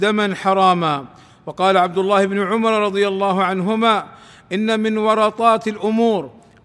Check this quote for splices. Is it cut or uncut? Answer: uncut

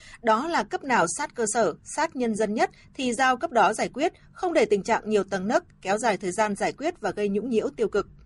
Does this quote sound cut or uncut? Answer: uncut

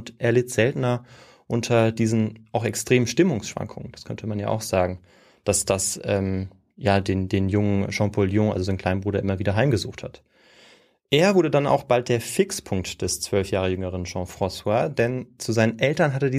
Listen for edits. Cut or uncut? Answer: uncut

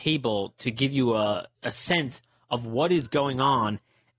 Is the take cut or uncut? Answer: cut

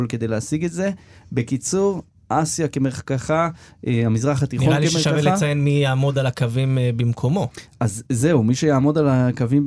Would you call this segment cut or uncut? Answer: uncut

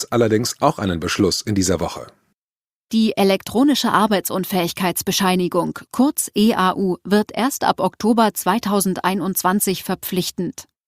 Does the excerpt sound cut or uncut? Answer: uncut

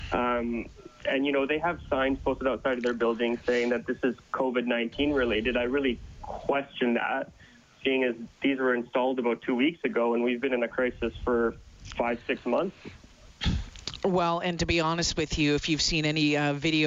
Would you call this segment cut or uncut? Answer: uncut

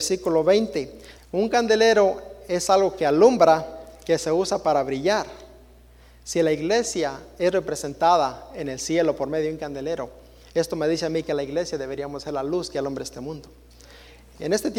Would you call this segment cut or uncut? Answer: cut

